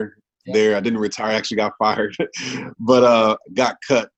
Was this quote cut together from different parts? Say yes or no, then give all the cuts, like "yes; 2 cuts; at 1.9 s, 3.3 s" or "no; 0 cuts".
no; 0 cuts